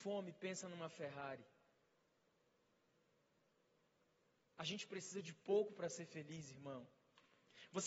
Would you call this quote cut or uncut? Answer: uncut